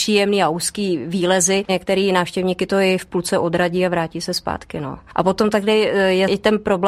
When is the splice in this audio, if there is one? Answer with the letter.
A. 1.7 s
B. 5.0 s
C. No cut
C